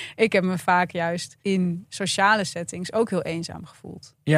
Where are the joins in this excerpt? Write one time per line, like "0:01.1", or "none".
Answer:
0:01.4

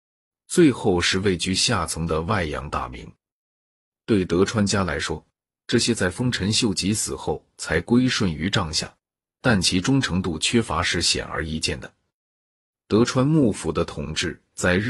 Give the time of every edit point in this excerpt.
0:09.3

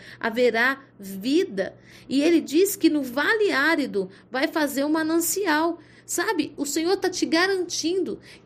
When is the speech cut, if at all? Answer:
none

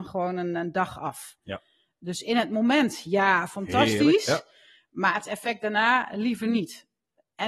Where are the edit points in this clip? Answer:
none

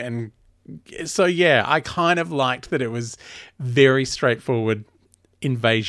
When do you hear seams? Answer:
none

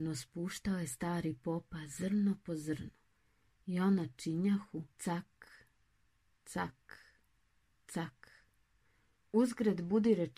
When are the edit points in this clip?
0:04.9
0:09.2

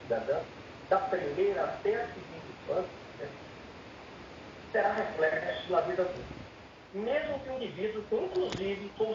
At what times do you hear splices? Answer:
none

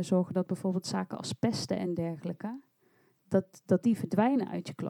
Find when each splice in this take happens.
none

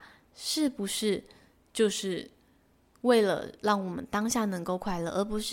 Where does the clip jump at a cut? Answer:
none

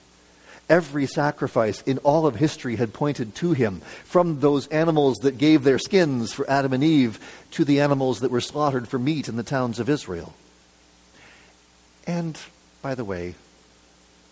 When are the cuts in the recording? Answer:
none

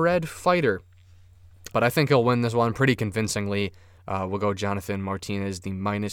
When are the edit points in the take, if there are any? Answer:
0:01.7
0:04.0

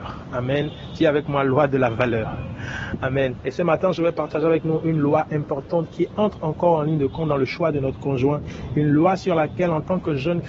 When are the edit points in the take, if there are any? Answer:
0:03.4

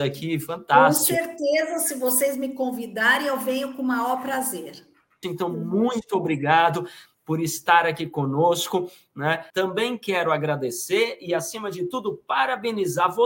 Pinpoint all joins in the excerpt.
0:05.2
0:09.5

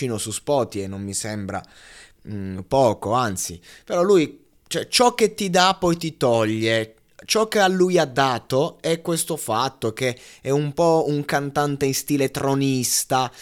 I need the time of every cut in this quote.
none

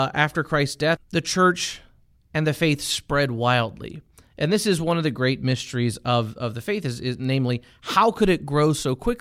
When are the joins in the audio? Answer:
0:01.0

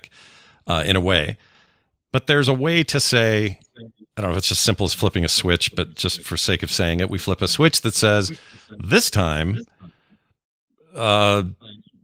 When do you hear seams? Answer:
0:02.0

